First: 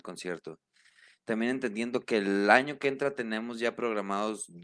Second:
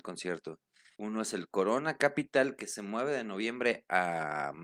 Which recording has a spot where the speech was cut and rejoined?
second; 1 cut; at 1.0 s

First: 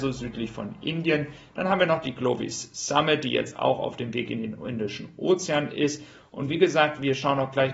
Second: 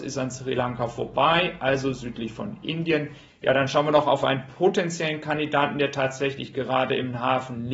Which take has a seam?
second; 1 cut; at 3.3 s

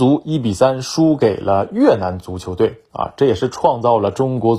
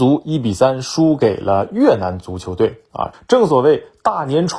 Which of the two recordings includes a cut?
second; 1 cut; at 3.1 s

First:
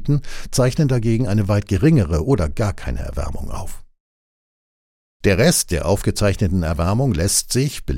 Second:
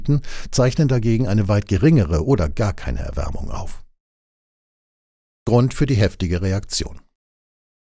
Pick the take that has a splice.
first; 1 cut; at 5.1 s

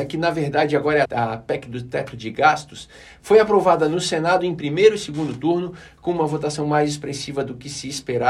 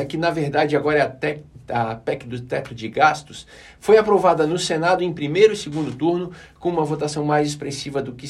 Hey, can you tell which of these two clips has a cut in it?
first; 1 cut; at 1.0 s

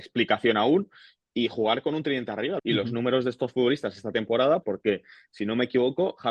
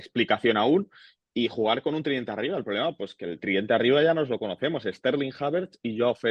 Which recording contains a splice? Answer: first; 2 cuts; at 2.6 s, 4.6 s

